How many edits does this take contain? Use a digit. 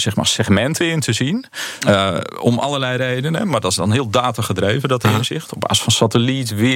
1